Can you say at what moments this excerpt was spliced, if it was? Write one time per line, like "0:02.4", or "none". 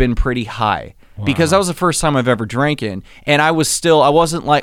none